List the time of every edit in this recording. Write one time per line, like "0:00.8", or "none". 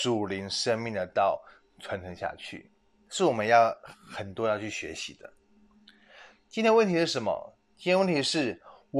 0:02.9

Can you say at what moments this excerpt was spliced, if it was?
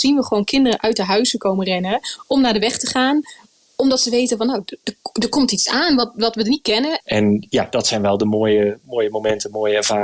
0:07.0

